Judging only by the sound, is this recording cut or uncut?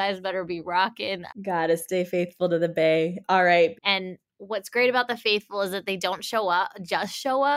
cut